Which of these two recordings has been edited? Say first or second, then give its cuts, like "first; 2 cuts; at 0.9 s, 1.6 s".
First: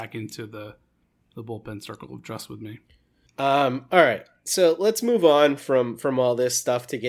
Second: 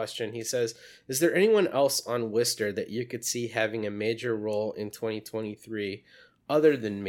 first; 1 cut; at 3.3 s